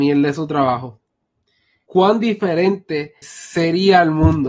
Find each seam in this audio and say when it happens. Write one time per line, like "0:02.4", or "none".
0:01.9
0:03.2